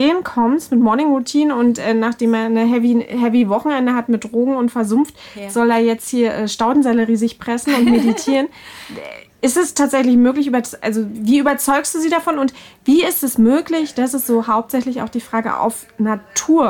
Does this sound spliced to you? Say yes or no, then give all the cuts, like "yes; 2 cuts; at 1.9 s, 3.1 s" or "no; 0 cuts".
no; 0 cuts